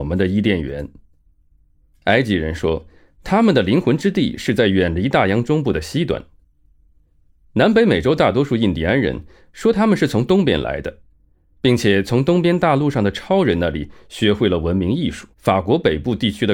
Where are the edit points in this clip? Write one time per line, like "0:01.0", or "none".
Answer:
0:15.3